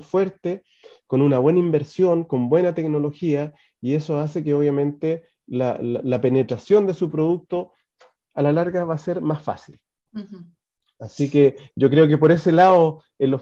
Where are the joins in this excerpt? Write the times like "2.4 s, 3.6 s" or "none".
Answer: none